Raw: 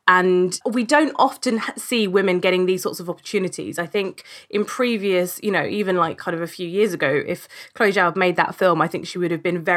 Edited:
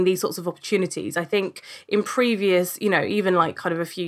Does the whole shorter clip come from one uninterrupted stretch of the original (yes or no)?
yes